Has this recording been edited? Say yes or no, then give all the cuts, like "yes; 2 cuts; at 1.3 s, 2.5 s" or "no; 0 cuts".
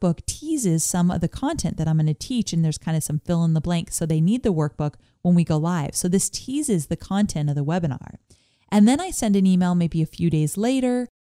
no; 0 cuts